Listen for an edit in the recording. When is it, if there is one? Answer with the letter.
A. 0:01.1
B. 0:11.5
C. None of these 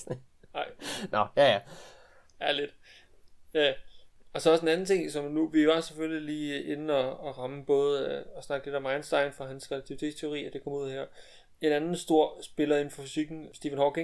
C